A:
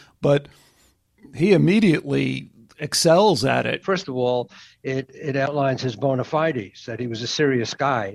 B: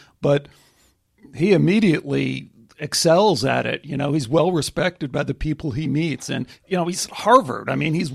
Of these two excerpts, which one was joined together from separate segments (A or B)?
A